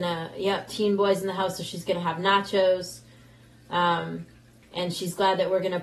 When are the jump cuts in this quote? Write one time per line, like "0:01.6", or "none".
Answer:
0:04.6